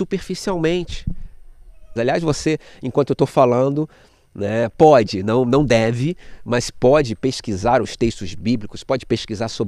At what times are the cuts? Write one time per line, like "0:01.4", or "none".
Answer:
0:02.0